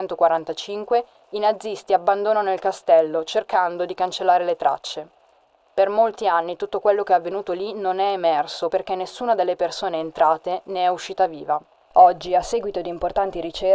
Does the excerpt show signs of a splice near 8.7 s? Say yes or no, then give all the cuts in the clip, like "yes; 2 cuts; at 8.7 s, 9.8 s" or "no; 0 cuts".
yes; 1 cut; at 8.7 s